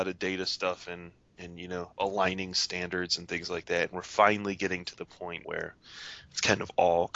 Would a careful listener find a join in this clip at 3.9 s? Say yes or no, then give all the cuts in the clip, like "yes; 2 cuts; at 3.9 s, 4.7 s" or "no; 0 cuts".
no; 1 cut; at 5.4 s